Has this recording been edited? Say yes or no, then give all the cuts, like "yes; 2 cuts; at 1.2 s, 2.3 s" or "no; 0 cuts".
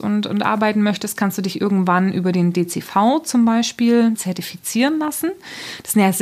yes; 1 cut; at 4.1 s